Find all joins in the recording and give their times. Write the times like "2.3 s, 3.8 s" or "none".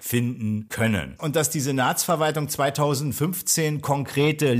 1.2 s